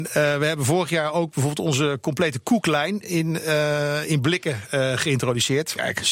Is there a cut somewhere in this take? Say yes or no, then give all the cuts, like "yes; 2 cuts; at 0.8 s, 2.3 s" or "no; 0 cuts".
no; 0 cuts